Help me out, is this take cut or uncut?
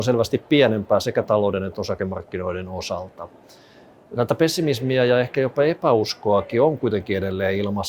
uncut